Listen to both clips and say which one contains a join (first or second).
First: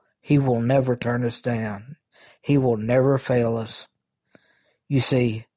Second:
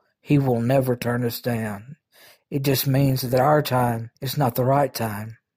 second